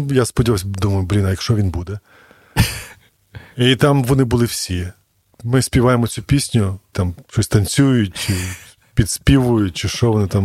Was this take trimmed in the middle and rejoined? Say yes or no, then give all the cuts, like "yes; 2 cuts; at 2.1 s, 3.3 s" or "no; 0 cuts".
yes; 1 cut; at 6.9 s